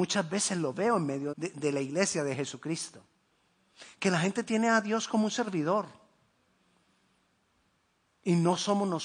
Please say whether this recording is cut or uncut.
cut